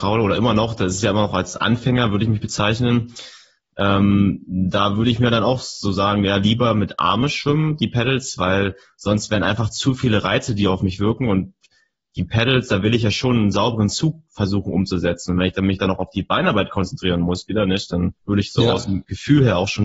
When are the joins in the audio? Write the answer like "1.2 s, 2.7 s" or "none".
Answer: 18.2 s